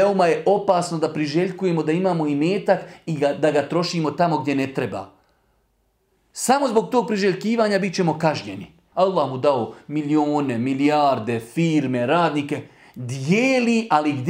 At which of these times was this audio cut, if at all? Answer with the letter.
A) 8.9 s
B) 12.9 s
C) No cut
A